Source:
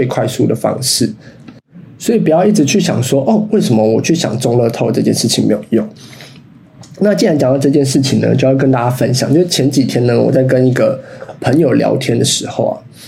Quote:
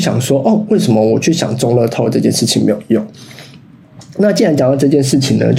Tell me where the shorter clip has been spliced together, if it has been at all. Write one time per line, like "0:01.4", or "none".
none